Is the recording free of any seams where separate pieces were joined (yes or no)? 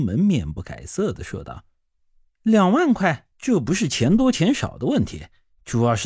no